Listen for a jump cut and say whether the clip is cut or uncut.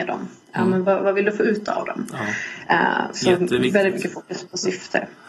uncut